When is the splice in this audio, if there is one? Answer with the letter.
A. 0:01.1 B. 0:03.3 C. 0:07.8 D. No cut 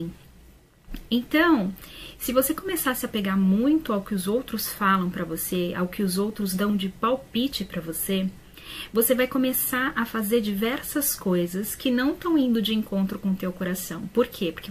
D